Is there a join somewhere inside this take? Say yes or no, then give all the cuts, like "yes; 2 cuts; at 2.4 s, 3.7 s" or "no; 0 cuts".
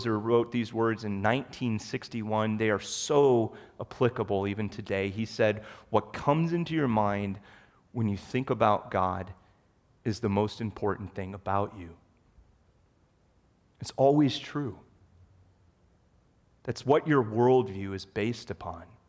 no; 0 cuts